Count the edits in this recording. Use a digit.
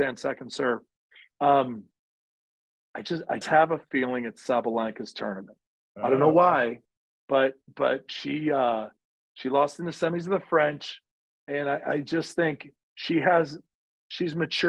1